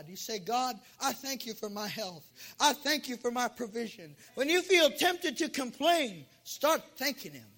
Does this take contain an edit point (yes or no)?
yes